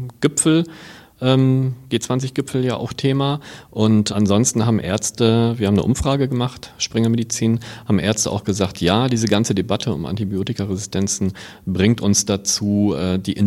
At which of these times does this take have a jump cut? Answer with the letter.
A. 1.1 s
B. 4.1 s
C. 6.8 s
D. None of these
B